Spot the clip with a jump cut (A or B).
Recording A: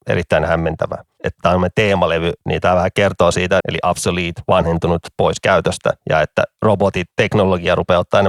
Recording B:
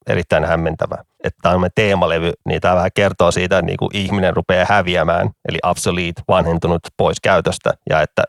A